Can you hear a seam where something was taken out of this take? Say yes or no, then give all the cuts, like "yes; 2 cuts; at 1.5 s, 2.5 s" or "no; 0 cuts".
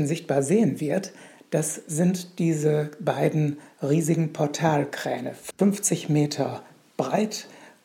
yes; 1 cut; at 5.5 s